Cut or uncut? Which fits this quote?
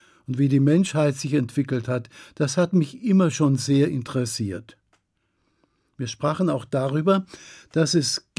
uncut